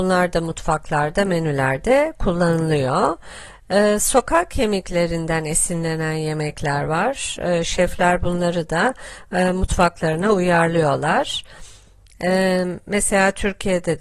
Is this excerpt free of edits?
yes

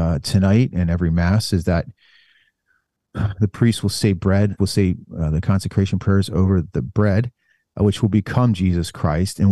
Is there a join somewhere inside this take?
yes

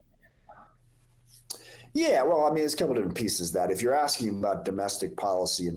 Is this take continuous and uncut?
yes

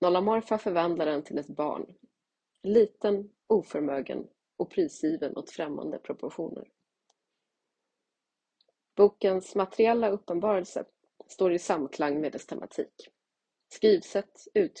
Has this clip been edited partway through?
yes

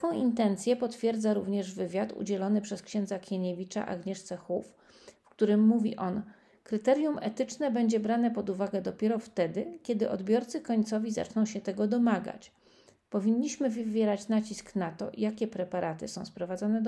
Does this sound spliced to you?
no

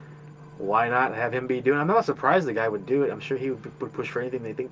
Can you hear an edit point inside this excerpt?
no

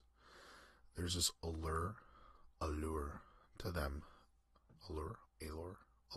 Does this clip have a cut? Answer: yes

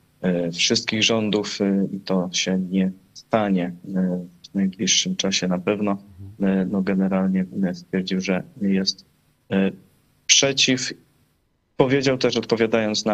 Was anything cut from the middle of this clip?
no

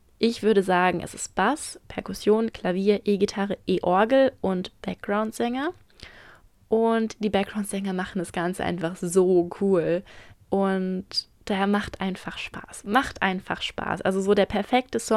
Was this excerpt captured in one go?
no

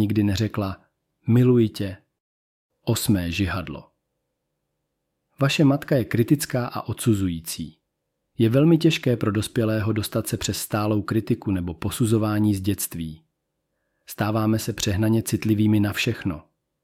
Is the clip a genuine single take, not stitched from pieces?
yes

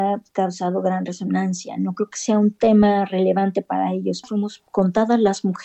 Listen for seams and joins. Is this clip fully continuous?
no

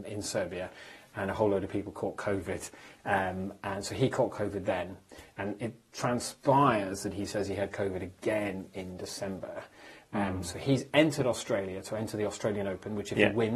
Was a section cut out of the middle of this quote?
no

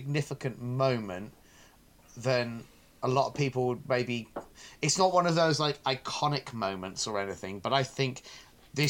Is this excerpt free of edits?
yes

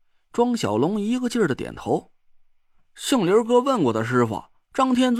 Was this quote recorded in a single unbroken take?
yes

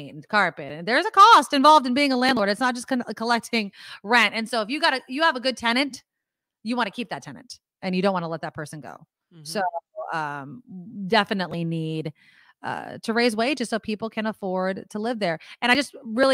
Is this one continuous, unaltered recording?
yes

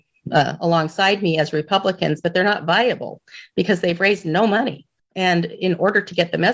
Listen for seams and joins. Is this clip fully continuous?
yes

